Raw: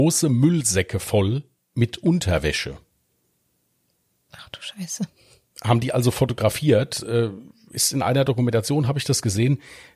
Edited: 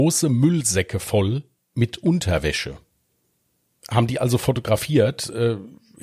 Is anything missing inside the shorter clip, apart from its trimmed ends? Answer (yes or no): yes